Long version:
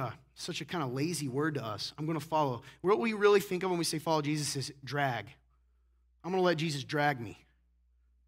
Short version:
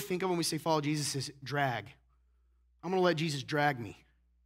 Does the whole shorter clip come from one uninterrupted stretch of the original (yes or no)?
yes